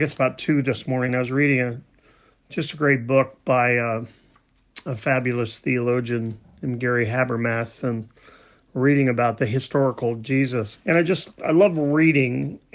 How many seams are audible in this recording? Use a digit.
2